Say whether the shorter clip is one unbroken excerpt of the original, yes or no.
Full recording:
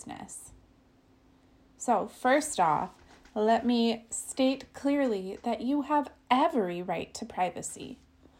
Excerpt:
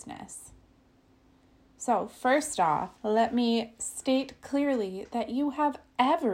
no